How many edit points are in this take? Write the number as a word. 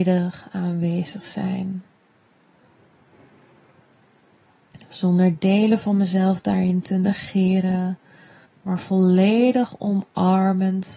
one